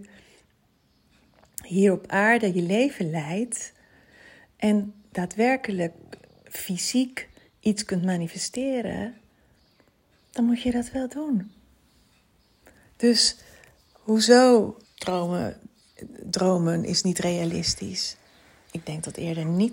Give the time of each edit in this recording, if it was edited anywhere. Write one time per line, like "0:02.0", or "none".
0:14.8